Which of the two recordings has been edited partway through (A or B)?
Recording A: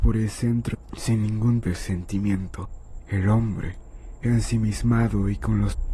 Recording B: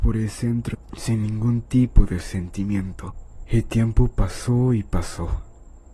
A